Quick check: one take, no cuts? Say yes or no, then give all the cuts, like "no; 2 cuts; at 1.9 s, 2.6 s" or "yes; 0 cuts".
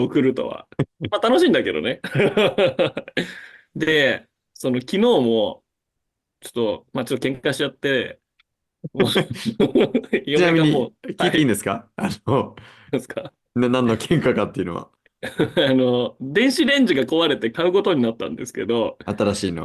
yes; 0 cuts